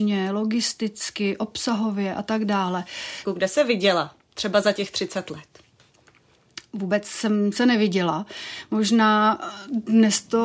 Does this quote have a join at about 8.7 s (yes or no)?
no